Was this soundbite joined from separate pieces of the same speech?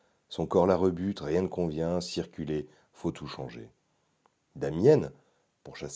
no; 0 cuts

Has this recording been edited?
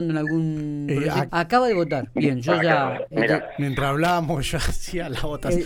yes; 1 cut; at 1.3 s

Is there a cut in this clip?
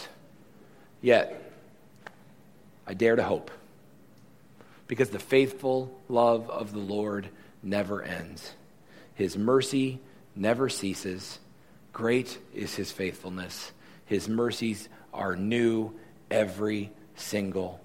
no; 0 cuts

